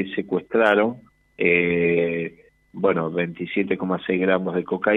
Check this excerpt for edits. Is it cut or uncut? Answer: uncut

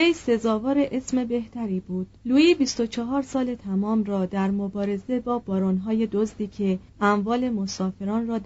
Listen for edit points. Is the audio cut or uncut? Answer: cut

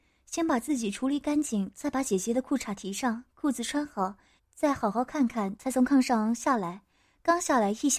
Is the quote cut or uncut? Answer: cut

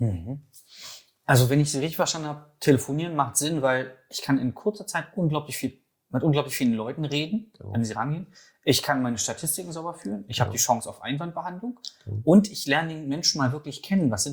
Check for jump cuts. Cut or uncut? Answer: uncut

